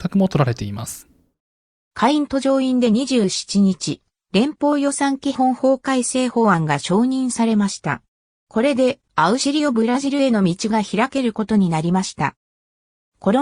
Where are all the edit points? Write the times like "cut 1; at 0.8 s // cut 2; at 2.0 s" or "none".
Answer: cut 1; at 9.1 s